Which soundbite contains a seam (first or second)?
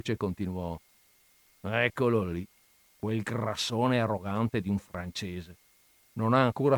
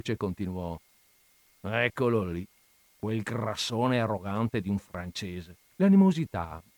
second